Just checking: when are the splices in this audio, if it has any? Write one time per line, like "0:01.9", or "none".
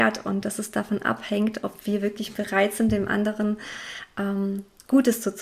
none

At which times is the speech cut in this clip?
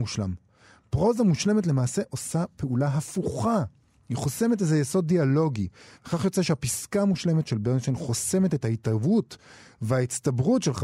none

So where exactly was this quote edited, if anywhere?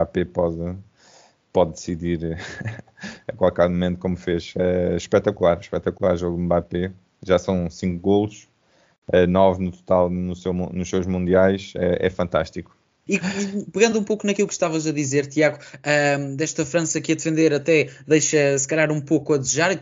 0:13.1

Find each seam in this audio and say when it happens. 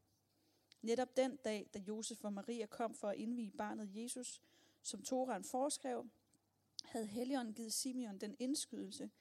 none

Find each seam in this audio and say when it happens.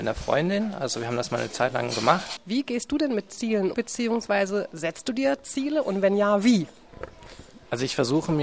0:02.4
0:03.7

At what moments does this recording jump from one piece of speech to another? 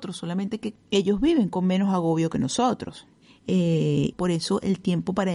0:04.1

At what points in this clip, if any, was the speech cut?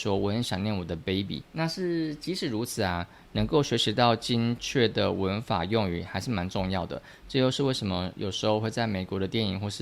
0:01.4

